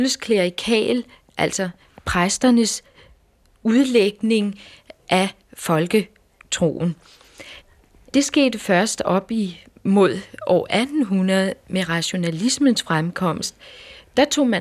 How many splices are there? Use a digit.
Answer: 1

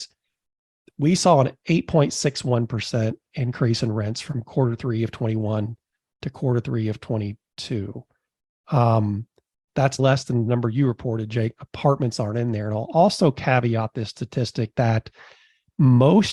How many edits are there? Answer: 2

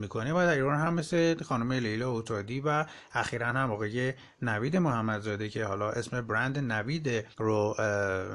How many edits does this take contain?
1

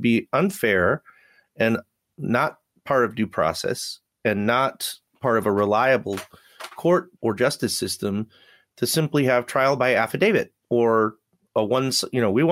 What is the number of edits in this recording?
2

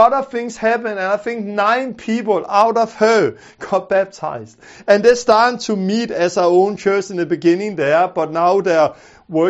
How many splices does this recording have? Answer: 0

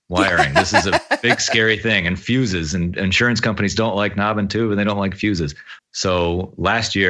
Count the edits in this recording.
1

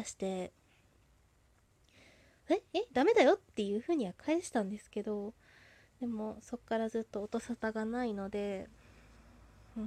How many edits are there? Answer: 0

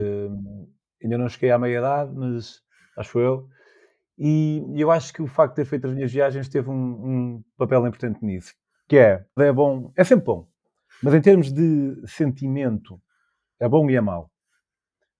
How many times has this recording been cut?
1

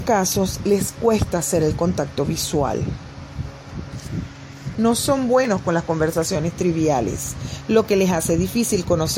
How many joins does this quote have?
1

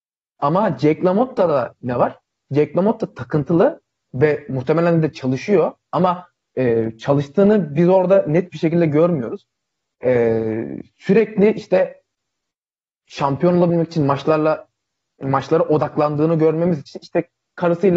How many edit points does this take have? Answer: 0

